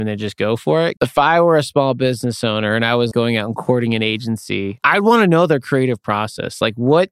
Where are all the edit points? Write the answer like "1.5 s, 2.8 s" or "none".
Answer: 1.0 s, 3.1 s